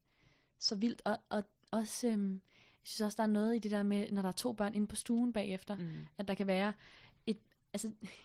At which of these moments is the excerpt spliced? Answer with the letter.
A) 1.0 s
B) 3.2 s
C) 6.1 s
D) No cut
D